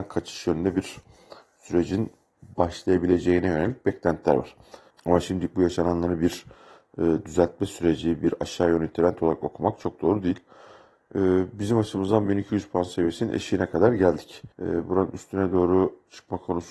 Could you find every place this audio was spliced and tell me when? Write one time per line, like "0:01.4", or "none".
0:04.9
0:14.5

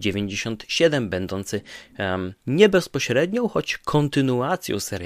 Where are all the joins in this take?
0:02.4

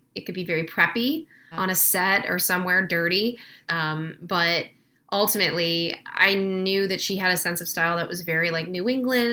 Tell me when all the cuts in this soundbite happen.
0:01.5
0:03.7

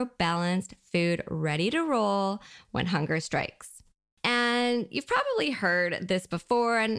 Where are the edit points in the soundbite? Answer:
0:04.2

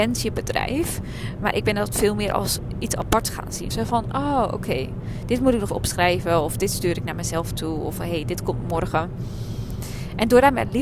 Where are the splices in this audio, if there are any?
0:03.7
0:05.7

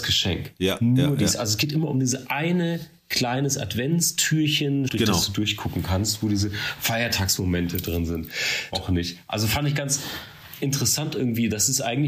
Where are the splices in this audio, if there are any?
0:04.9
0:08.7

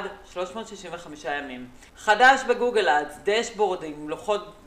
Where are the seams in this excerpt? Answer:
0:01.9

